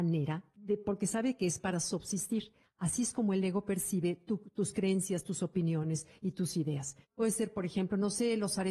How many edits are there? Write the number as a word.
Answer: one